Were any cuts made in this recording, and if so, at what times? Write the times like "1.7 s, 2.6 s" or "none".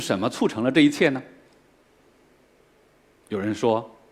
none